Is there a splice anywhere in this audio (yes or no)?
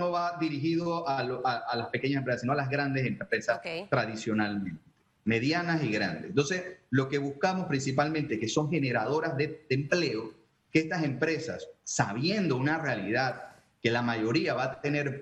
no